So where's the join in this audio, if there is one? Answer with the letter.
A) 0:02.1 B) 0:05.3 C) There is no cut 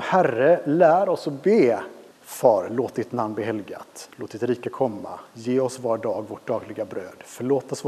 A